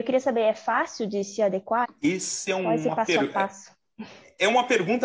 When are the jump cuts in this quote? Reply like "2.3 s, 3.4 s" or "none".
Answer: 1.8 s